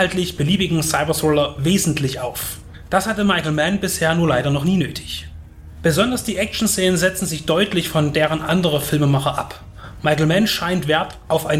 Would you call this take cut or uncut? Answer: uncut